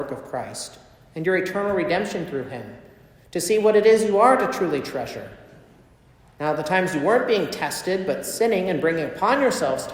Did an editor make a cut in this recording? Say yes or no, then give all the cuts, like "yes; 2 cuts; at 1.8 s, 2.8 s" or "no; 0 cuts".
no; 0 cuts